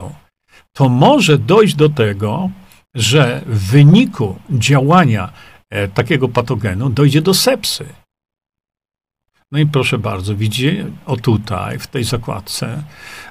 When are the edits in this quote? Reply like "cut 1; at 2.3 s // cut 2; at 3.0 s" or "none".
cut 1; at 11.0 s